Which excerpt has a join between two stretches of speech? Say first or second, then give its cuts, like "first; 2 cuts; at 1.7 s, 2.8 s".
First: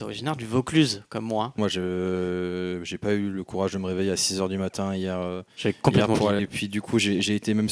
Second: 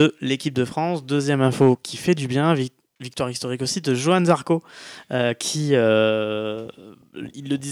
first; 2 cuts; at 1.6 s, 6.4 s